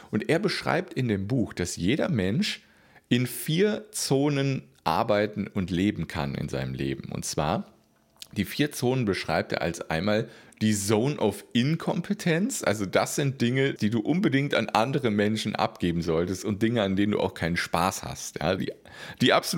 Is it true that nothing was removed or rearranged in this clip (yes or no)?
no